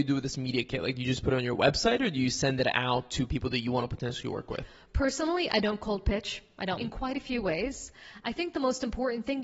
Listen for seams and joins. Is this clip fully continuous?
no; 1 cut; at 6.8 s

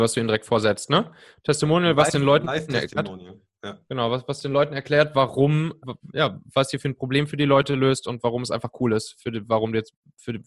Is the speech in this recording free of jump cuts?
no; 1 cut; at 5.8 s

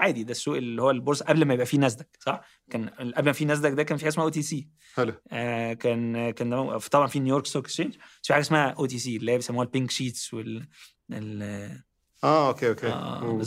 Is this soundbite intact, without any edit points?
yes; 0 cuts

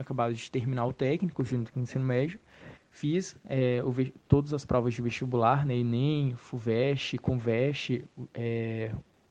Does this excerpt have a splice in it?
yes; 1 cut; at 2.8 s

